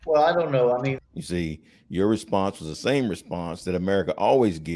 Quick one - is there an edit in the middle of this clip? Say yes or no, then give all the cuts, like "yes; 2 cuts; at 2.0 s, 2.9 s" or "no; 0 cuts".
no; 0 cuts